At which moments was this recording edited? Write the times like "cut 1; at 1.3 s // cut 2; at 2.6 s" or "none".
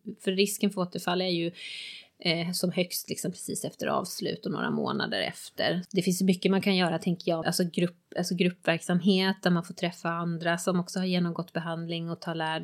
cut 1; at 5.8 s // cut 2; at 7.4 s